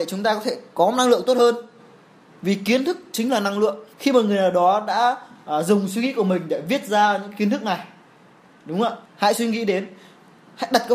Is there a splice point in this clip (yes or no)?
yes